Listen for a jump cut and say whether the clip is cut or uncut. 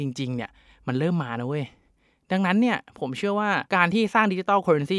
cut